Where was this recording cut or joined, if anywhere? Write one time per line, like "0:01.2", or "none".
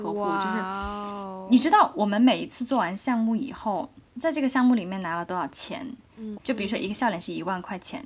0:06.3